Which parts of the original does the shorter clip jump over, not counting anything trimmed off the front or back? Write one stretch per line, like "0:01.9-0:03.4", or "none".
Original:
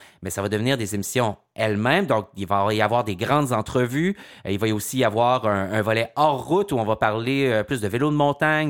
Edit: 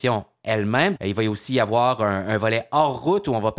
0:02.1-0:04.4